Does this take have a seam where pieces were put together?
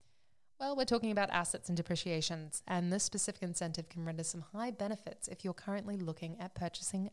yes; 1 cut; at 2.6 s

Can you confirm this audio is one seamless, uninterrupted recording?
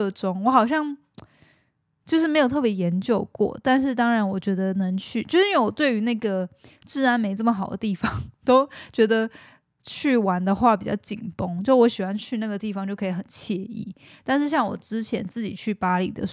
yes; 0 cuts

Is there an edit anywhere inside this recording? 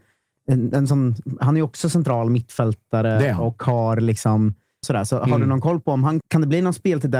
yes; 2 cuts; at 4.8 s, 6.2 s

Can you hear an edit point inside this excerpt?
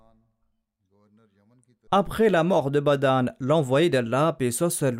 yes; 1 cut; at 1.9 s

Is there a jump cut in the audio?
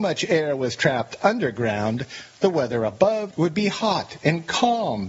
no; 0 cuts

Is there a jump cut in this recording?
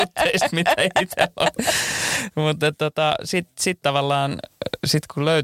no; 0 cuts

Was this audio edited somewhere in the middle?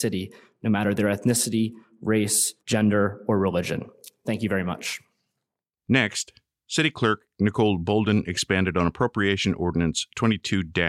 yes; 1 cut; at 2.6 s

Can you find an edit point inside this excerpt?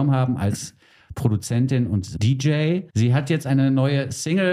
yes; 1 cut; at 2.9 s

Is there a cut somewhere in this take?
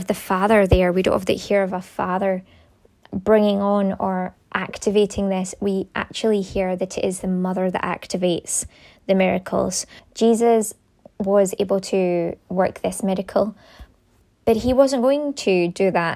yes; 1 cut; at 10.0 s

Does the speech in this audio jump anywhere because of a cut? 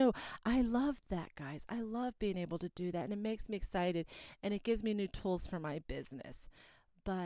no; 0 cuts

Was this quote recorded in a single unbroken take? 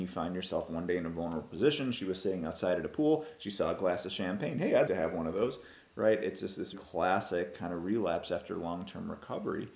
no; 2 cuts; at 4.9 s, 6.7 s

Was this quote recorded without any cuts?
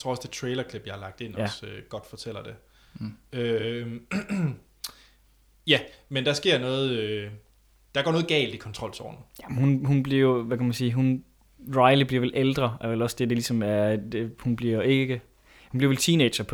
yes; 0 cuts

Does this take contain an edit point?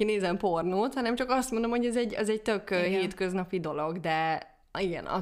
no; 0 cuts

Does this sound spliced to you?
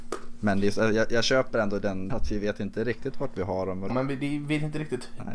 yes; 2 cuts; at 2.1 s, 3.9 s

